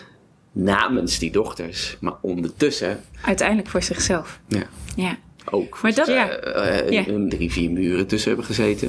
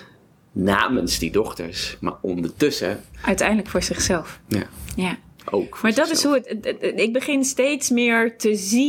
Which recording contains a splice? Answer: first; 2 cuts; at 6.1 s, 7.3 s

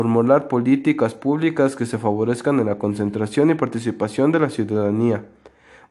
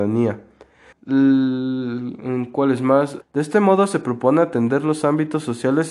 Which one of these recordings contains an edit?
second; 2 cuts; at 0.9 s, 3.2 s

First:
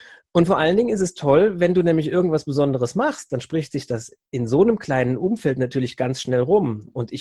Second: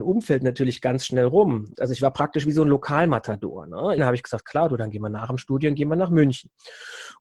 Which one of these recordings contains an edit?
second; 2 cuts; at 1.7 s, 4.0 s

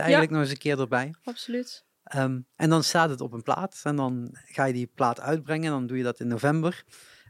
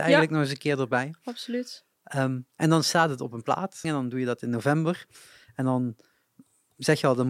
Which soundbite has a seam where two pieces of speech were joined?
second; 1 cut; at 3.8 s

